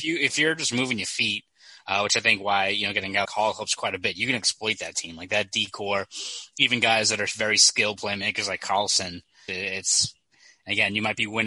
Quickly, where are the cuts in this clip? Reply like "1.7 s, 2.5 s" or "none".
3.2 s, 9.5 s